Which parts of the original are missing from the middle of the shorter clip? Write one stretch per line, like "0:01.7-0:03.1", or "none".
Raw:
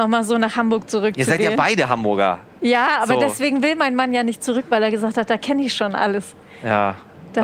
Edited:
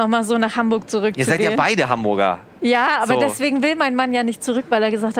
none